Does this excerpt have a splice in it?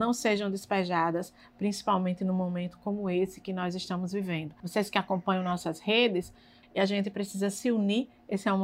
yes; 2 cuts; at 4.6 s, 6.6 s

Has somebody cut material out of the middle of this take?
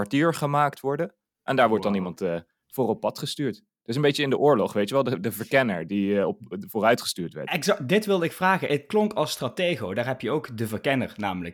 no; 0 cuts

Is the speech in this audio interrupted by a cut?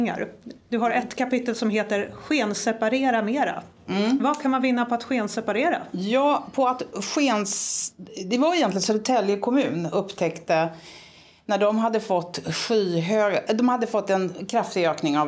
no; 0 cuts

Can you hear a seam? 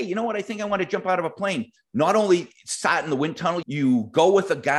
yes; 2 cuts; at 1.9 s, 3.6 s

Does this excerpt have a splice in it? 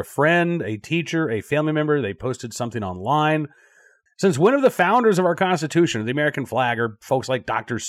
yes; 1 cut; at 4.1 s

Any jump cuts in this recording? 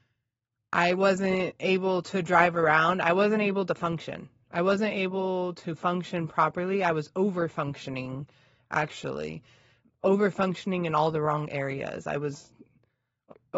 no; 0 cuts

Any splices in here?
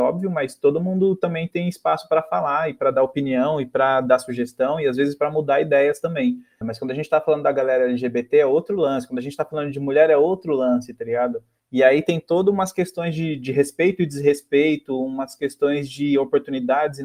yes; 1 cut; at 6.6 s

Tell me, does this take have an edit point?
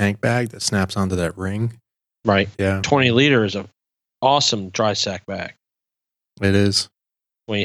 yes; 1 cut; at 2.5 s

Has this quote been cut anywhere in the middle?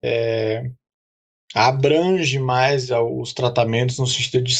no; 0 cuts

